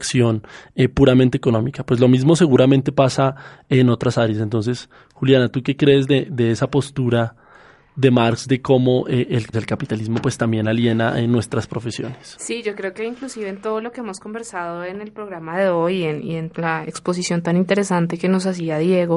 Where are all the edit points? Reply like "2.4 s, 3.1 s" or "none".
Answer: 9.5 s, 16.5 s